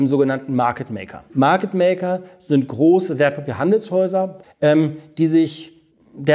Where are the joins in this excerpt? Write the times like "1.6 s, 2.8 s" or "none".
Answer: 1.3 s, 4.4 s